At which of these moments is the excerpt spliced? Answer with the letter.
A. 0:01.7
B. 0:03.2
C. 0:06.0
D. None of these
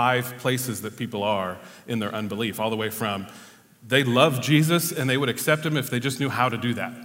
D